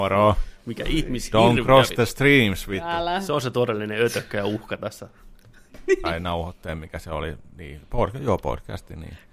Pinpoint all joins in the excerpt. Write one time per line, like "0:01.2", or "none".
0:06.0